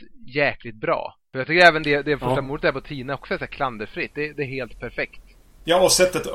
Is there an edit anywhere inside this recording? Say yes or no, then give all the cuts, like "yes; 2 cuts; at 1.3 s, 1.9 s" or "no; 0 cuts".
no; 0 cuts